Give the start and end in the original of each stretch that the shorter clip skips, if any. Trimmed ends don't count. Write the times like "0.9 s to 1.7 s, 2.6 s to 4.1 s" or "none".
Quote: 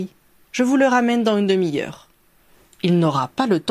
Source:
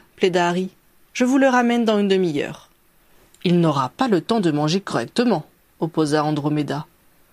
none